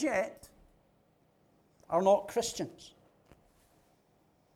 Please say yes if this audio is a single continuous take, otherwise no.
yes